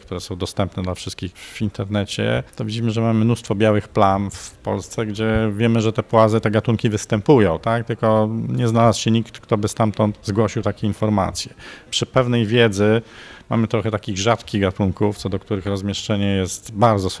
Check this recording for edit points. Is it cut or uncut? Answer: cut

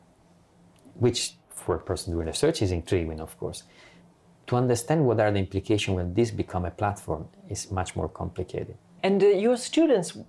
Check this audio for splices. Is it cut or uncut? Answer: cut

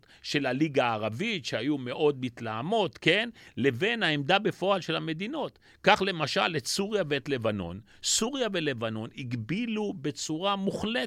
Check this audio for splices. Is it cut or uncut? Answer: uncut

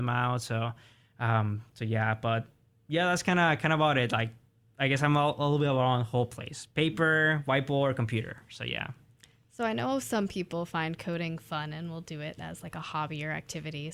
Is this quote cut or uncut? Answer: uncut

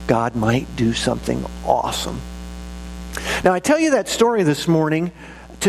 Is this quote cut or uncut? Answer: uncut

